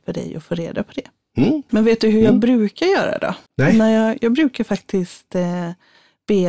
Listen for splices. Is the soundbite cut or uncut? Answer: cut